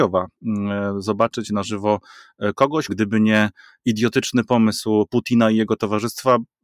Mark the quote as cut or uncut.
cut